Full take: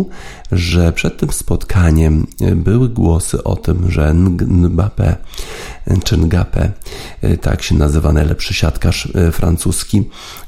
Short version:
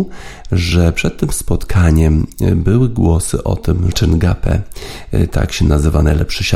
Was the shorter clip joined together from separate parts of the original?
yes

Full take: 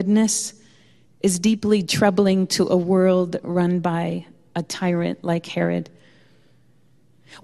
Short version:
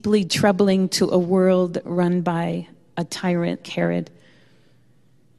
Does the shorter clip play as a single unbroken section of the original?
no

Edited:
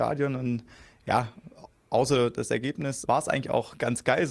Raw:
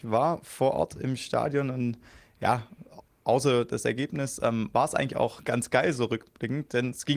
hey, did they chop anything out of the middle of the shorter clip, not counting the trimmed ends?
yes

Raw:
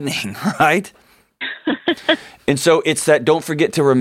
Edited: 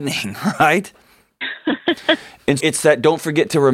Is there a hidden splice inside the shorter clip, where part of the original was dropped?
yes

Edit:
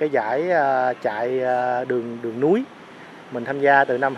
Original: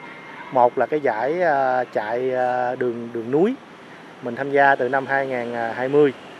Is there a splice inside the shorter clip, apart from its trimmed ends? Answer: no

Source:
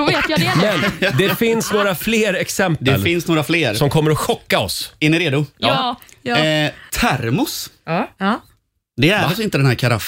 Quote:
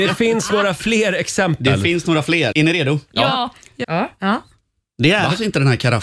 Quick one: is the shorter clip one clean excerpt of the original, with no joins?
no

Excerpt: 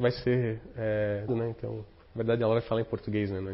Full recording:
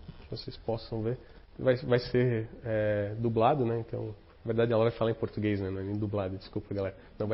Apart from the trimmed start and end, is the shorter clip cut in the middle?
yes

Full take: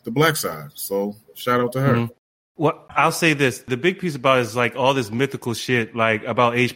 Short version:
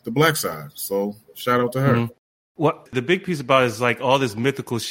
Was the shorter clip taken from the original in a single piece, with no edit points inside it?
no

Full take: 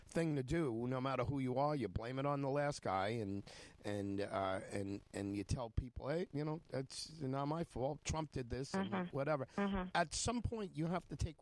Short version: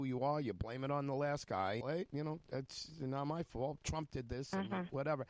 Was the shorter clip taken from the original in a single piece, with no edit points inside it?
no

